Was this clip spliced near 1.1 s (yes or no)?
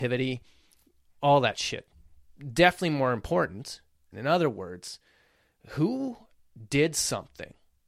no